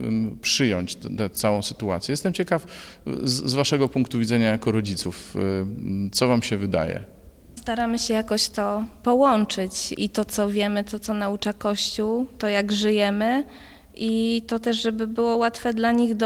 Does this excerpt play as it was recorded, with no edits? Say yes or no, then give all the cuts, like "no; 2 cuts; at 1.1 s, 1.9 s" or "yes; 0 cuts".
no; 1 cut; at 10.0 s